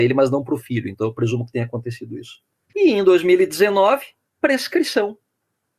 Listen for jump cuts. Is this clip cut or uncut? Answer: cut